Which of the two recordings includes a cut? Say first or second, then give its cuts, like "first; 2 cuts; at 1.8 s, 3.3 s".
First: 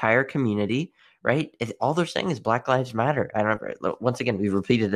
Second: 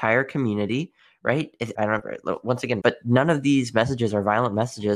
second; 2 cuts; at 1.7 s, 2.8 s